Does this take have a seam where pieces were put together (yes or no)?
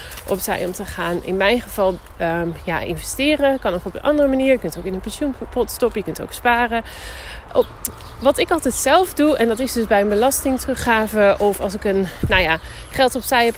yes